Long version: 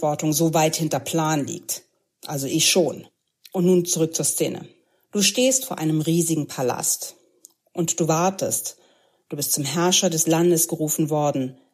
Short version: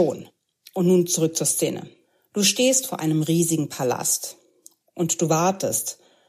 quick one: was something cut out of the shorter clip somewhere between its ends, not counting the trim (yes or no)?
no